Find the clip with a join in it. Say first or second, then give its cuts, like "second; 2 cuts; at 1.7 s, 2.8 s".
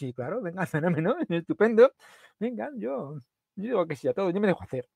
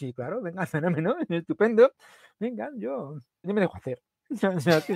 second; 1 cut; at 3.4 s